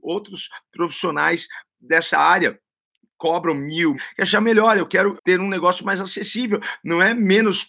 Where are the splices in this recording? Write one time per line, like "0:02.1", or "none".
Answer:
0:03.9
0:05.2